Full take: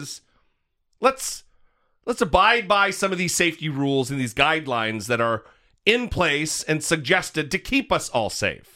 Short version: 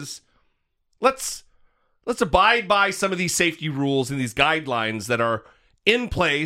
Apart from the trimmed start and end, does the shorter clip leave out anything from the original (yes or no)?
no